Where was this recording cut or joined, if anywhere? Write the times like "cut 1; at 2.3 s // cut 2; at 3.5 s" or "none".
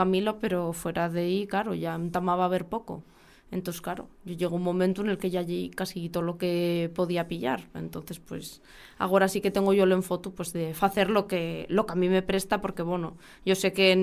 none